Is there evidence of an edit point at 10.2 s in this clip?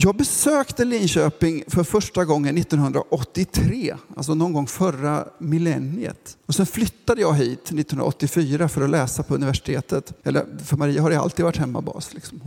yes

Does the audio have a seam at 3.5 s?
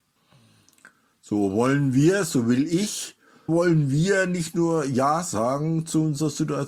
yes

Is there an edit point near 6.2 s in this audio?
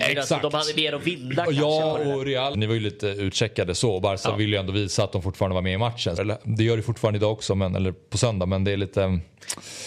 yes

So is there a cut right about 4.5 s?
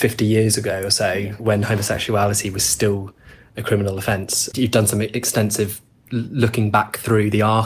yes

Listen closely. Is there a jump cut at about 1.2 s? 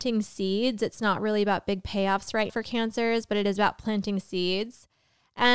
no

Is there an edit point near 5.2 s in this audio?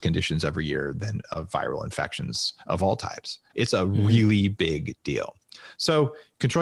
no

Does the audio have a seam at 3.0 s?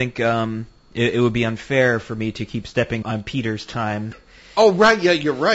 yes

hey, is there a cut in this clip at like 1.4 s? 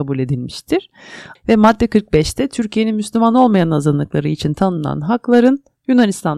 yes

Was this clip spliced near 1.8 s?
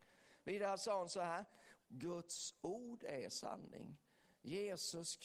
yes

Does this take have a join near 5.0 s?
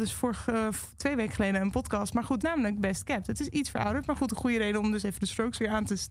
no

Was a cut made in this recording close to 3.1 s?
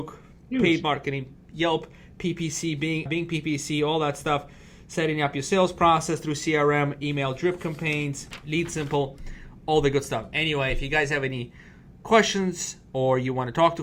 yes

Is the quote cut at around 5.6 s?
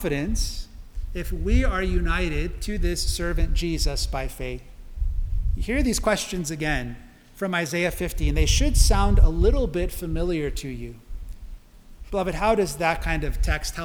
no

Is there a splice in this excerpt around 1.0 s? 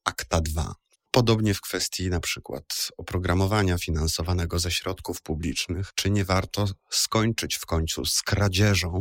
yes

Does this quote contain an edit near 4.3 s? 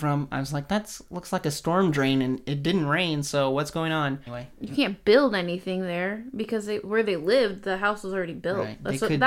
yes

